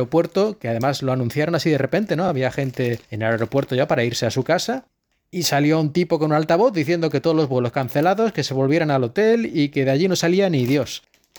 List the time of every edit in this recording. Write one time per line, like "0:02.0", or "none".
none

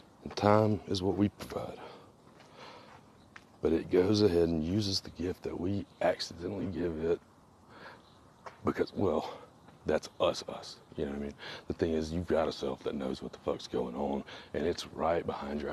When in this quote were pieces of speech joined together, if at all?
none

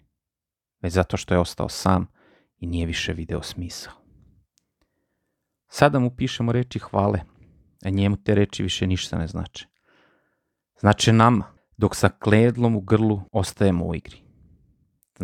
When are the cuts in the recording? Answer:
0:11.6
0:13.3

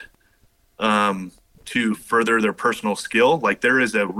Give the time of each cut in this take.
0:01.6

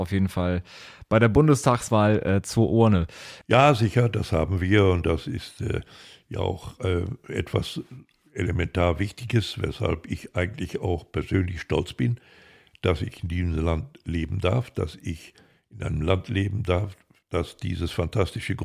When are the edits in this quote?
0:03.4

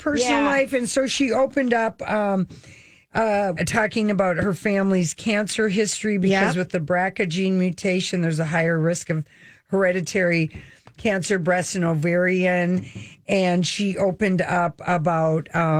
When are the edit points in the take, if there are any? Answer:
0:03.6

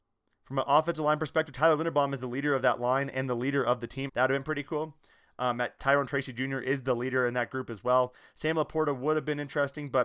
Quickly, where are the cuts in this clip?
0:04.1
0:05.8

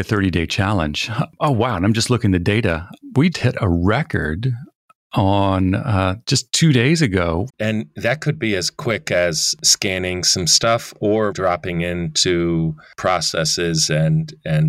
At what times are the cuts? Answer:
0:03.3
0:07.5
0:11.3

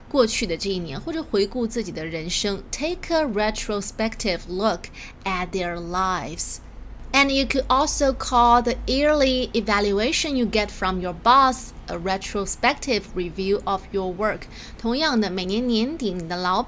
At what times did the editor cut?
none

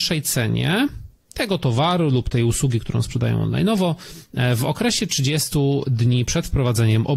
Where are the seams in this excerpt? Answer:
none

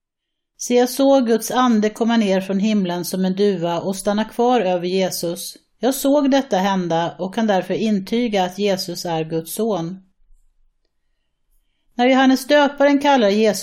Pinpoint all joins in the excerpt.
0:05.8

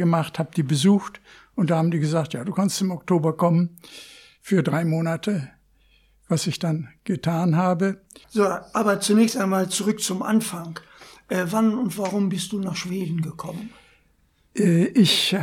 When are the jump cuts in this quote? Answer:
0:08.2

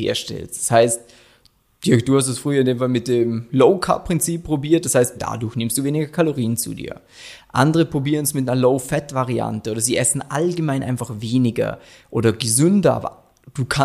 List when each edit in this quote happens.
0:05.2

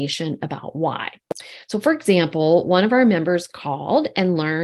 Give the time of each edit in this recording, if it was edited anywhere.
none

